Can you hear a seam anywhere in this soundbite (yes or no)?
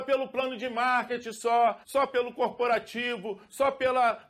yes